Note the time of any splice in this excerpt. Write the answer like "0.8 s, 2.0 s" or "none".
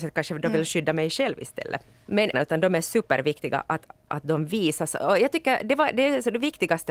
2.3 s